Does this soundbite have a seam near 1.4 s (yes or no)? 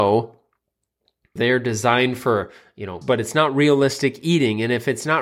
yes